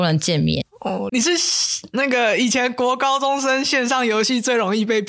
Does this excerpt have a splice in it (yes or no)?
yes